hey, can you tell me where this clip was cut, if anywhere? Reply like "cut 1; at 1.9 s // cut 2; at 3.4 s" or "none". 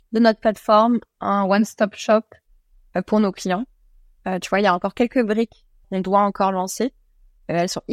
cut 1; at 5.8 s